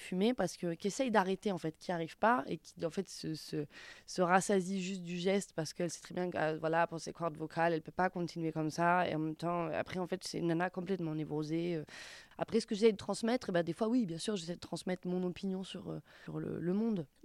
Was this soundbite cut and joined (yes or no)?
no